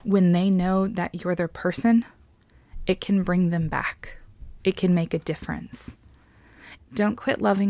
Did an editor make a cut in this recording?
yes; 1 cut; at 6.8 s

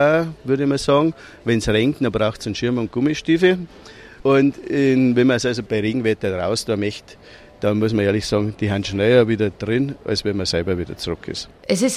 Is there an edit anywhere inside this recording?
no; 0 cuts

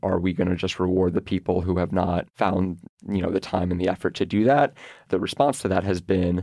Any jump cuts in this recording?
no; 0 cuts

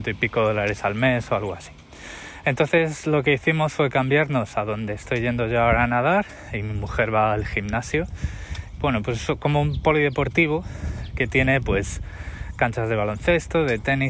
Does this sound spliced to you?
yes; 1 cut; at 8.8 s

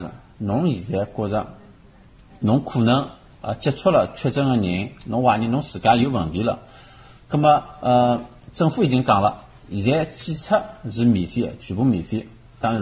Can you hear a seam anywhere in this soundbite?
no; 0 cuts

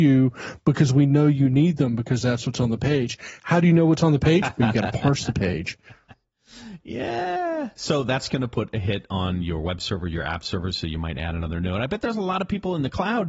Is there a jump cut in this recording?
no; 0 cuts

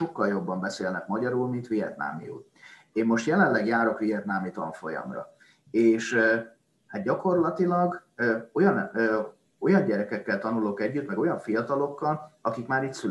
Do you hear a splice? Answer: no; 0 cuts

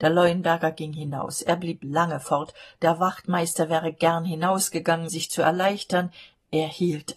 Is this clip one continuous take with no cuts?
no; 1 cut; at 5.1 s

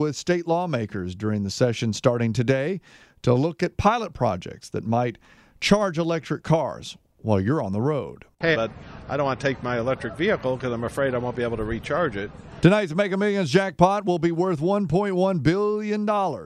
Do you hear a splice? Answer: yes; 2 cuts; at 8.5 s, 12.6 s

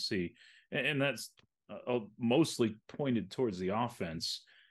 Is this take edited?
no; 0 cuts

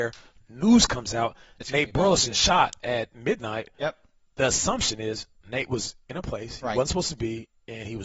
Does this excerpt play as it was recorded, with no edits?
yes; 0 cuts

